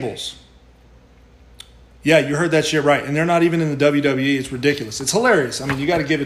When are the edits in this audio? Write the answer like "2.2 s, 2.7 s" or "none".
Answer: none

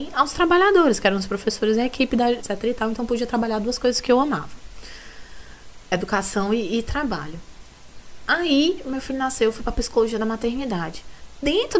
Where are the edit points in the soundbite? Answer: 2.4 s

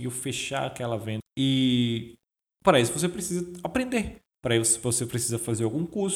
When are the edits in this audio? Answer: 1.2 s, 4.3 s

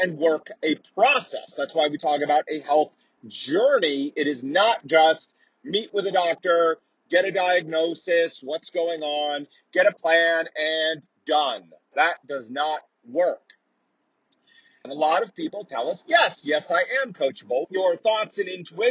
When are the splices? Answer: 14.8 s, 17.6 s

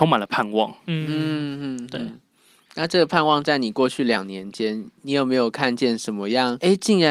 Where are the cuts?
none

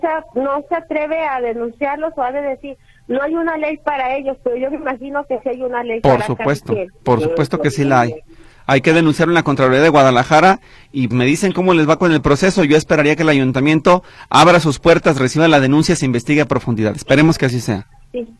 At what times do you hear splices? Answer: 11.1 s

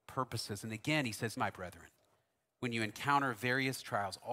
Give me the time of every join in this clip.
1.4 s

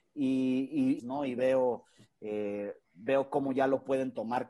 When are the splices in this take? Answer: 1.0 s

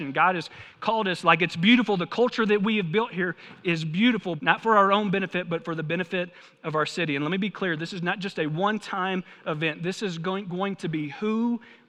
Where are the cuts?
4.4 s

